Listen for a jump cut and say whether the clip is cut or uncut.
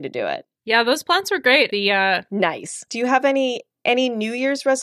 cut